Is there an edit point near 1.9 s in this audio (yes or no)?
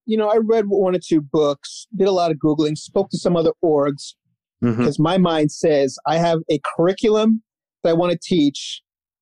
no